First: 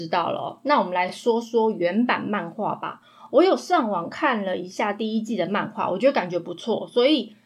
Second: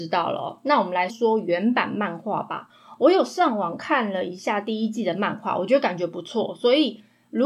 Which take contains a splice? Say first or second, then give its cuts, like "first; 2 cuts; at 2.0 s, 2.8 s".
second; 1 cut; at 1.1 s